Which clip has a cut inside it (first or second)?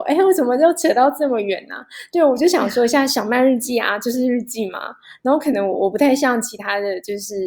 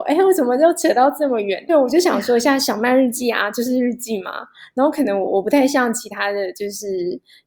second